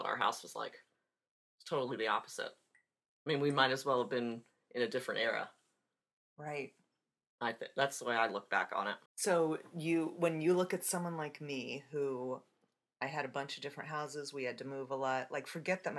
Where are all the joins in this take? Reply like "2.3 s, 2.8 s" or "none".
9.1 s